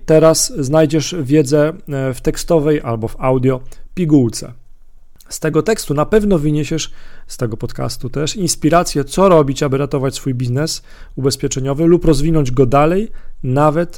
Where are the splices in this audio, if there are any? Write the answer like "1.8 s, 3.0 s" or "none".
none